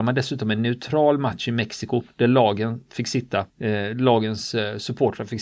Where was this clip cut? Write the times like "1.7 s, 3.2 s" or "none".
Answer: 3.5 s